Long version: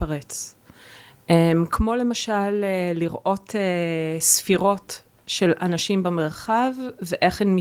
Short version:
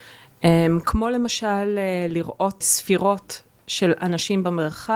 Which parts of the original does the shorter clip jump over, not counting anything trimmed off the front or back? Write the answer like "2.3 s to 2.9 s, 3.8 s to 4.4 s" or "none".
3.5 s to 4.2 s